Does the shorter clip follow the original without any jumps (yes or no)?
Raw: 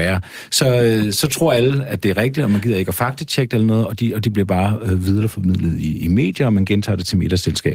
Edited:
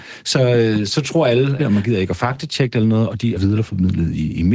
no